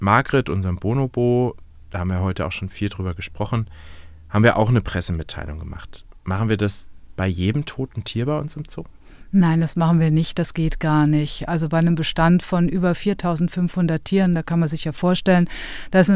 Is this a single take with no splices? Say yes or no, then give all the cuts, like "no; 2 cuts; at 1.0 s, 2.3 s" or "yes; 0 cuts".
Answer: yes; 0 cuts